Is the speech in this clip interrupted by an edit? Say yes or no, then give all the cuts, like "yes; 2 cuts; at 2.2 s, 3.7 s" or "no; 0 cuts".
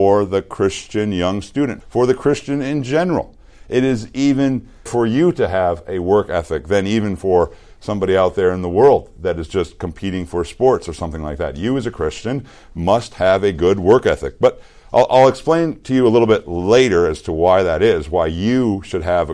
yes; 2 cuts; at 1.8 s, 4.9 s